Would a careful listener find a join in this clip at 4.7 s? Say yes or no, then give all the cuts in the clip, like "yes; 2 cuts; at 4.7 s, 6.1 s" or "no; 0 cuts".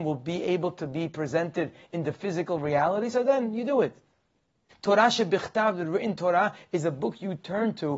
yes; 1 cut; at 4.7 s